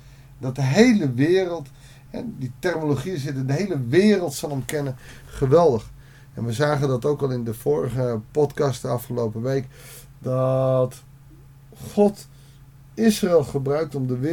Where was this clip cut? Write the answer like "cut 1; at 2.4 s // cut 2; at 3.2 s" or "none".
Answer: none